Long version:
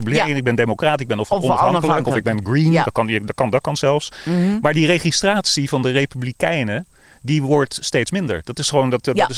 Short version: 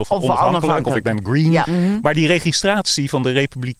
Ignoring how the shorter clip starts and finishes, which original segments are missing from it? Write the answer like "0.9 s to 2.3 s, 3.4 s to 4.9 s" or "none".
2.8 s to 4.2 s